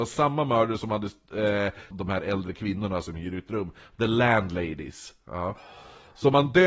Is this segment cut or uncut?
cut